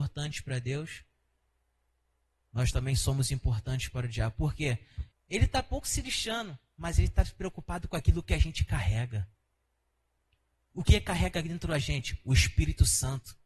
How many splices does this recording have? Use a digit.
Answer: 1